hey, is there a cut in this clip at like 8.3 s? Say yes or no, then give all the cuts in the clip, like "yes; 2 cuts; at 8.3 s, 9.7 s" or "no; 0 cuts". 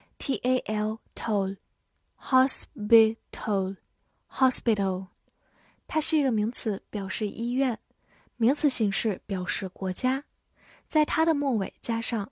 yes; 1 cut; at 8.3 s